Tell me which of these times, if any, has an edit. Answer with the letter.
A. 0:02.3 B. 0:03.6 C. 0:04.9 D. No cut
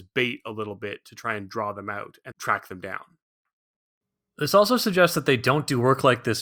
A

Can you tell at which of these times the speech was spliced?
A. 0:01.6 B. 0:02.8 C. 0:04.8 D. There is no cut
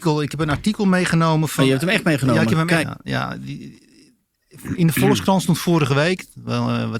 B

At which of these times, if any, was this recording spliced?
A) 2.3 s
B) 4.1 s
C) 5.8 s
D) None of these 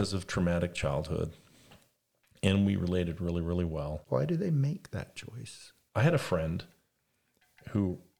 B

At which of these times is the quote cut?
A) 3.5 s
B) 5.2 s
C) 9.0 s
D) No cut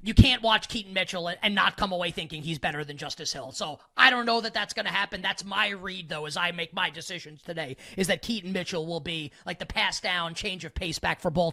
D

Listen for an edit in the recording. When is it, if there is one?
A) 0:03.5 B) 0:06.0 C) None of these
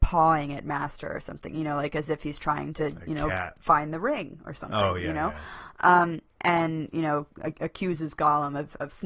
C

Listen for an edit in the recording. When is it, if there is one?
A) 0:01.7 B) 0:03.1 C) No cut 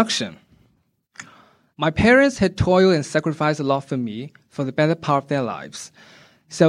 A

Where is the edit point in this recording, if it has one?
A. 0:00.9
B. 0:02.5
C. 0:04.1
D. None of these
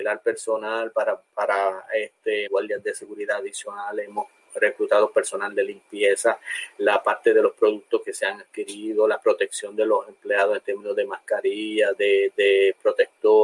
B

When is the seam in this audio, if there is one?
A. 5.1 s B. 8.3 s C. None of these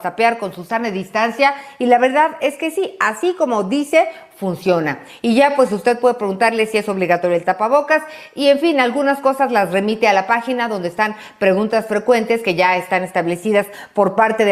C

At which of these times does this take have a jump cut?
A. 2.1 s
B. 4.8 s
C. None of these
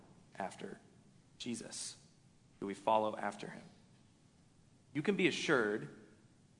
C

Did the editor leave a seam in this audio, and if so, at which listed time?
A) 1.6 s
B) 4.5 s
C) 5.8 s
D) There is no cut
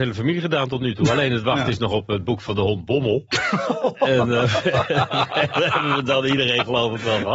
D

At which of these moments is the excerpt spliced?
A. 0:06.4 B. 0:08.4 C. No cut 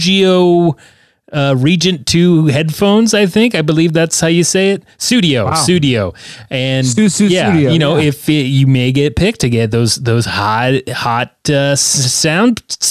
C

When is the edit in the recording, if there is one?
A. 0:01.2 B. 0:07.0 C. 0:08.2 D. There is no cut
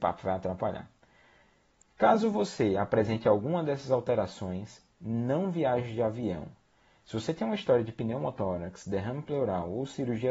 D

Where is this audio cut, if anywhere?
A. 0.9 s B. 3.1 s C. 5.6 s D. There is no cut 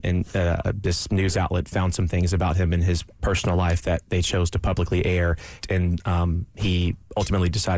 C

